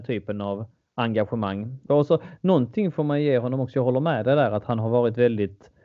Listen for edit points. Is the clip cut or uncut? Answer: cut